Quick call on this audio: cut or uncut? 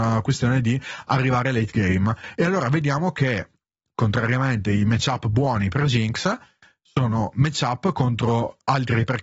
uncut